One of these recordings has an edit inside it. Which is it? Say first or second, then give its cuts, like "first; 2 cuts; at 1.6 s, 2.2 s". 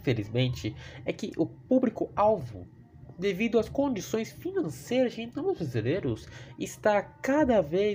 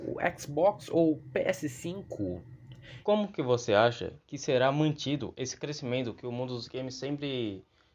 second; 1 cut; at 3.0 s